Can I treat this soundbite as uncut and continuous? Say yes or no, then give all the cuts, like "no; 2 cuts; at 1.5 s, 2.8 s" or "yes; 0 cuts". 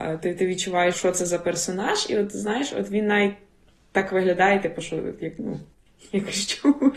no; 1 cut; at 0.9 s